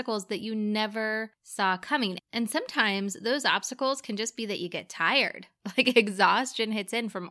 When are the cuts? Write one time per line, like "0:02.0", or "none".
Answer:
none